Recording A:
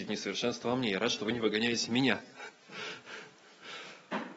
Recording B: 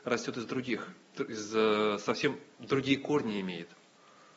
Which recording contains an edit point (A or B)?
B